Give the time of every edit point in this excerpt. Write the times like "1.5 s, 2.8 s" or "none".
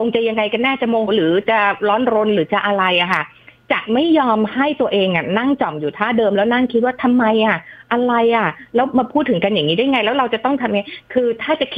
1.1 s